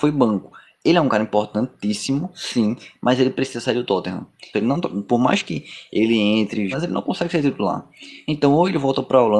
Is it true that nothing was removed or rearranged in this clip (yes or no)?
no